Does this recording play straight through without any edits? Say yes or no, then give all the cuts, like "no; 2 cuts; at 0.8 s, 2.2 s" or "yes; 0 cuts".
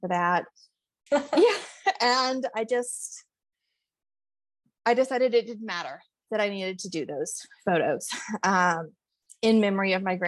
no; 1 cut; at 1.1 s